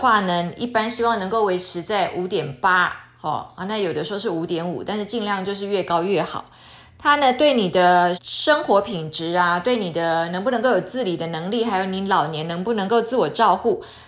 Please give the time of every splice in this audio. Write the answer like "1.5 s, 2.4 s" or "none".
8.1 s